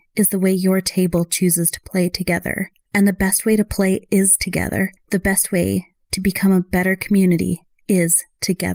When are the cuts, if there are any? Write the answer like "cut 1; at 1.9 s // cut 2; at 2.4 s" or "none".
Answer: none